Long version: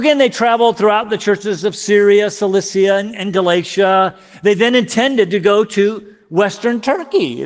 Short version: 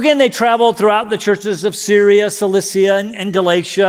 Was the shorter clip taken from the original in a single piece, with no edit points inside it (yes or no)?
yes